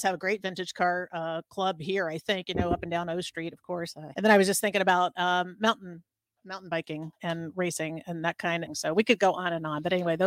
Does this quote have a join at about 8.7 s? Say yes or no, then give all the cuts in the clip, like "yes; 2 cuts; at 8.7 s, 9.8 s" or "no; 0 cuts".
yes; 2 cuts; at 4.1 s, 8.7 s